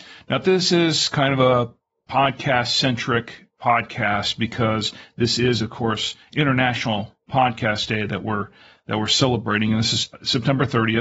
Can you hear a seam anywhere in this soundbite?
no; 0 cuts

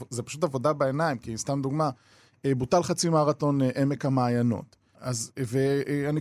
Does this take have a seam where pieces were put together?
yes; 1 cut; at 4.9 s

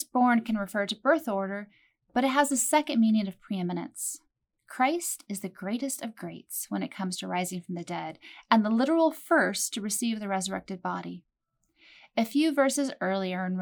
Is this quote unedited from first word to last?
yes; 0 cuts

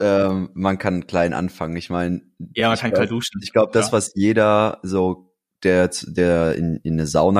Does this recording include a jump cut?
no; 0 cuts

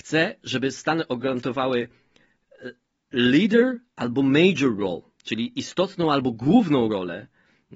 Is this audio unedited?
yes; 0 cuts

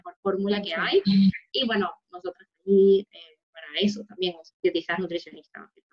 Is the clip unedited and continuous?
no; 2 cuts; at 2.5 s, 4.5 s

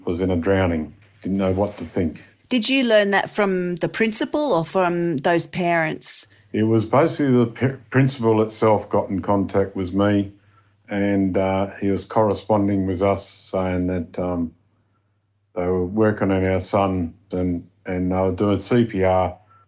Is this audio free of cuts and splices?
no; 1 cut; at 17.3 s

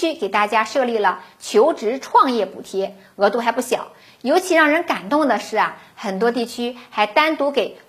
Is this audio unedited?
yes; 0 cuts

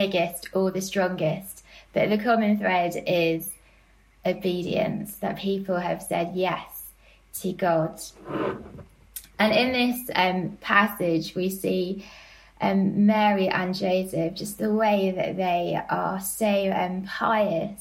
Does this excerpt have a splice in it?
no; 0 cuts

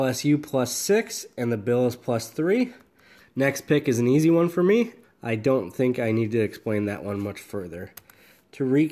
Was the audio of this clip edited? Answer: yes; 2 cuts; at 3.2 s, 5.0 s

